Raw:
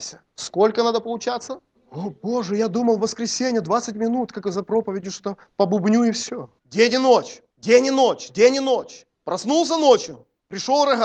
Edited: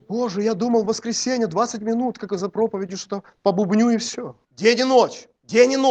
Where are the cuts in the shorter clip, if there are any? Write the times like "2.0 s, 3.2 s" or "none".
none